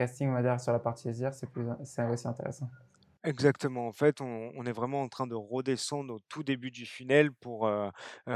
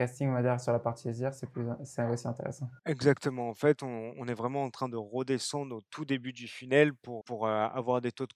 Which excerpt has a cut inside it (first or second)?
second